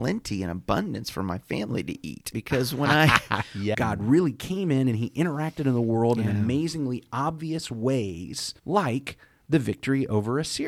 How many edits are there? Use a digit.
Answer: 3